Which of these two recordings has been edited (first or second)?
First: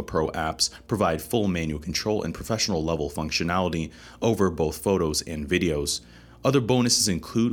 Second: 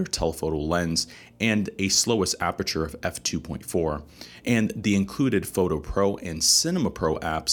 second